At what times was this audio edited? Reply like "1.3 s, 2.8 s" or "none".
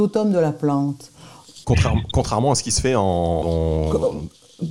1.6 s, 3.4 s